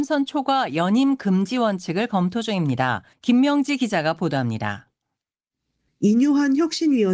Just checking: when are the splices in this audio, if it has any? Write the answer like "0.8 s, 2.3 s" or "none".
3.1 s

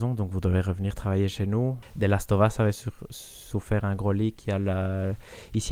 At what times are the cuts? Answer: 1.8 s

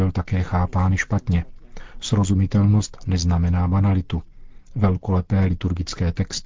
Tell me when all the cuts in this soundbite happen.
none

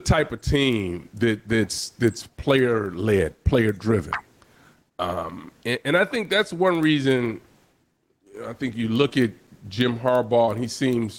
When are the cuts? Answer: none

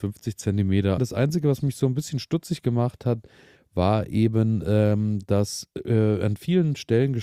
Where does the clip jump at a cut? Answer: 1.0 s

